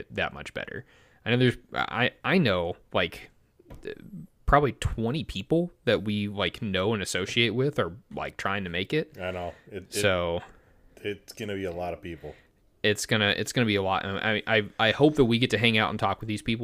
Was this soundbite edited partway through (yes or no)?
no